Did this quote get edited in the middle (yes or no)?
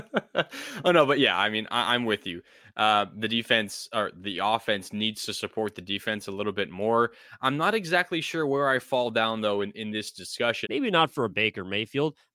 yes